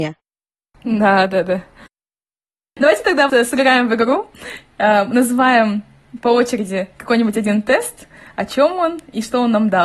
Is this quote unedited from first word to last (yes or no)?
no